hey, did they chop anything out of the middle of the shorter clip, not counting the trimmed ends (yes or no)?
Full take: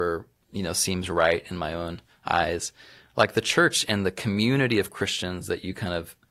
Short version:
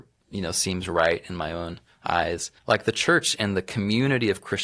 yes